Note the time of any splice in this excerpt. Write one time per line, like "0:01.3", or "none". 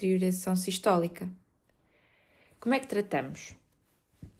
none